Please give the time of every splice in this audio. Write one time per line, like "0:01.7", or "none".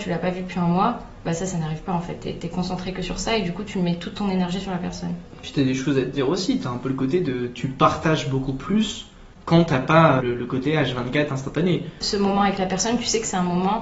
0:10.2
0:12.0